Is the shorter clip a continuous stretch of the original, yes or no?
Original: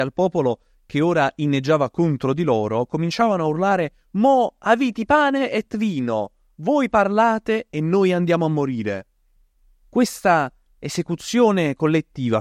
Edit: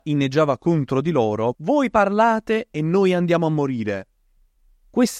no